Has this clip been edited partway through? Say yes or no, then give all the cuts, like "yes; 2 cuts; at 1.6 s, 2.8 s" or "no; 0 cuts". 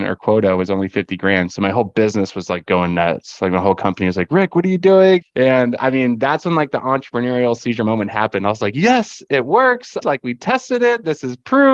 yes; 2 cuts; at 5.2 s, 10.0 s